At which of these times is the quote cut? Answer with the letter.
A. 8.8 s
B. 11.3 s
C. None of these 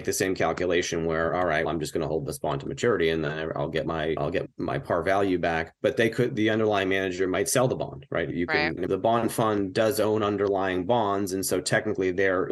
A